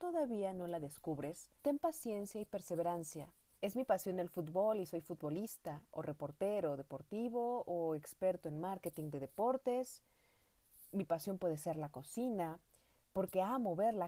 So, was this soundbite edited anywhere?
yes; 2 cuts; at 1.6 s, 3.5 s

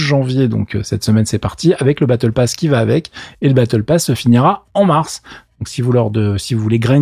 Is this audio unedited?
yes; 0 cuts

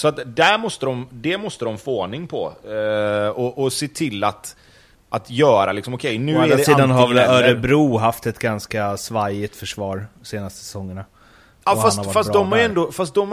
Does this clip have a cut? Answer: no; 0 cuts

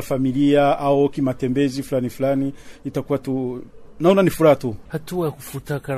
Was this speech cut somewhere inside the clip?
yes; 1 cut; at 4.9 s

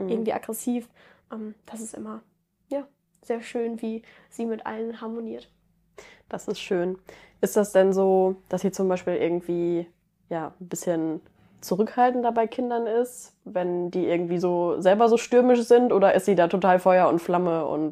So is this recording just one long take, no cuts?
yes; 0 cuts

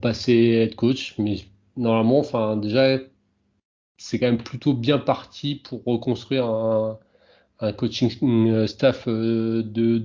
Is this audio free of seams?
yes; 0 cuts

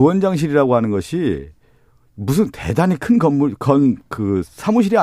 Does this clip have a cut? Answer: no; 0 cuts

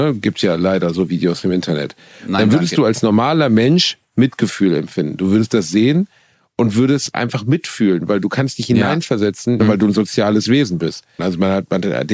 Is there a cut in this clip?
yes; 2 cuts; at 9.6 s, 11.2 s

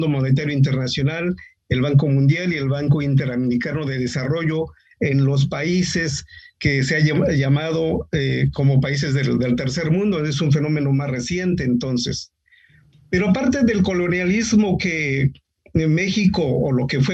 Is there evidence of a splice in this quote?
no; 0 cuts

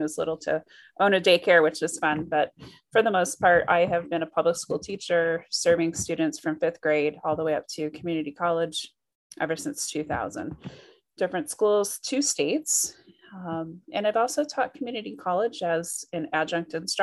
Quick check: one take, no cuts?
yes; 0 cuts

